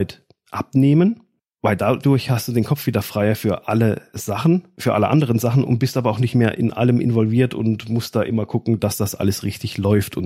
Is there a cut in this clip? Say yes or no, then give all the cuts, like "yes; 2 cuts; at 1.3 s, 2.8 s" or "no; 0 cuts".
no; 0 cuts